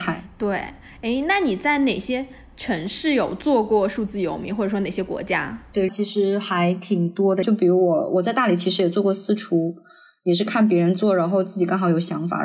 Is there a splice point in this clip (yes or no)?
yes